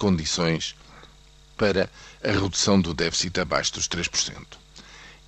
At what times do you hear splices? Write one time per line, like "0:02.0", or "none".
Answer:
none